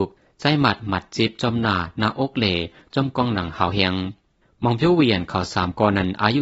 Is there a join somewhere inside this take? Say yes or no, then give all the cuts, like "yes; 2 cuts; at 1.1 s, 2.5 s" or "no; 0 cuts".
no; 0 cuts